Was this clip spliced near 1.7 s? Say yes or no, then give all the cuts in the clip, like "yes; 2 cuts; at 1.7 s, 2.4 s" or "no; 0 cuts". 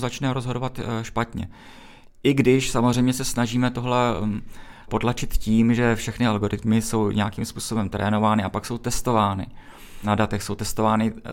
no; 0 cuts